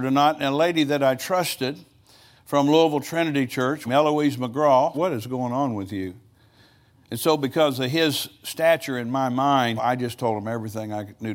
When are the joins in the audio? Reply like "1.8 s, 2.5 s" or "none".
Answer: 3.9 s, 4.9 s, 9.8 s